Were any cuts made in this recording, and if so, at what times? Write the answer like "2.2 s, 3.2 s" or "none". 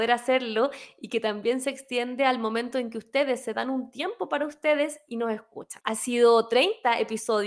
5.8 s